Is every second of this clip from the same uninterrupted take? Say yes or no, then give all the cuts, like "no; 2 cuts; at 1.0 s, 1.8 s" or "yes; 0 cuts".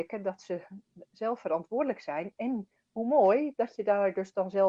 yes; 0 cuts